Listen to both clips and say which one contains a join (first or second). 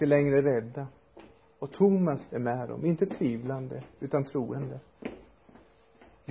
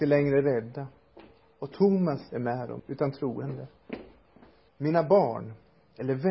second